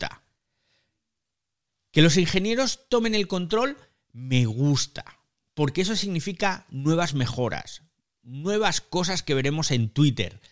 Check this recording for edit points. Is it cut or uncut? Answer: uncut